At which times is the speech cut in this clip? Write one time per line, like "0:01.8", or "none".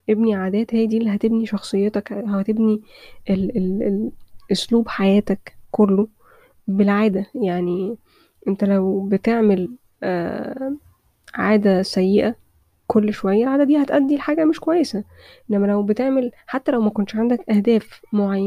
none

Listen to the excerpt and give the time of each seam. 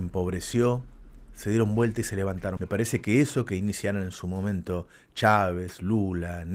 0:02.6

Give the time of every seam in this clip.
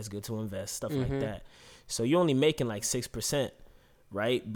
none

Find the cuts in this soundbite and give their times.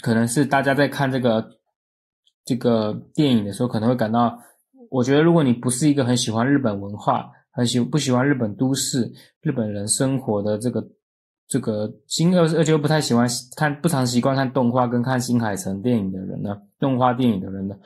none

